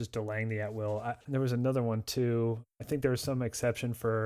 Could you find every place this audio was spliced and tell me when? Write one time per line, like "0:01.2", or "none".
0:01.2